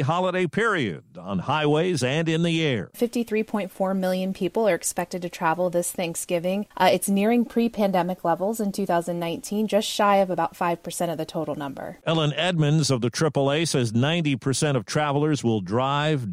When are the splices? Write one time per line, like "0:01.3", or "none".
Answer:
none